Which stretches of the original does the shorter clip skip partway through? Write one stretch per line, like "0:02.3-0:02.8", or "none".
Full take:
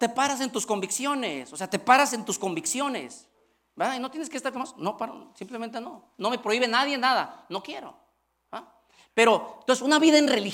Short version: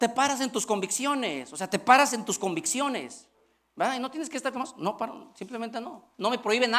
none